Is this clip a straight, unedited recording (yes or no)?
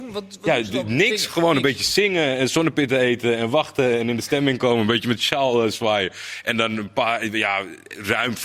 yes